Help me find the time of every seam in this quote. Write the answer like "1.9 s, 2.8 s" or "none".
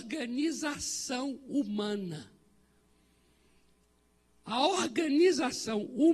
none